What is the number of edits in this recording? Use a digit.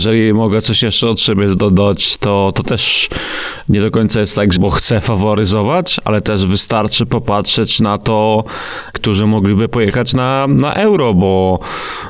2